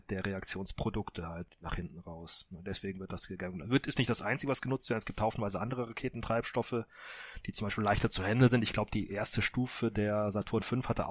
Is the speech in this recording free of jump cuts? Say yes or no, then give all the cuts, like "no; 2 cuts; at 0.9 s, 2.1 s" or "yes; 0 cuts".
yes; 0 cuts